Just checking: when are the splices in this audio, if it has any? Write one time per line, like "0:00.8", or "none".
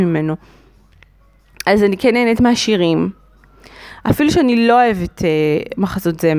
none